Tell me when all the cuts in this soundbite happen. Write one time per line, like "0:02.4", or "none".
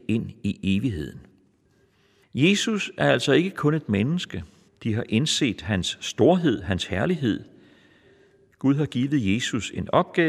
0:02.2
0:04.7